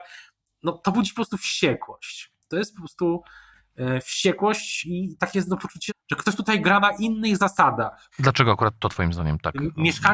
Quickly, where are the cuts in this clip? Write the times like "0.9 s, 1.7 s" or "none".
5.9 s, 8.1 s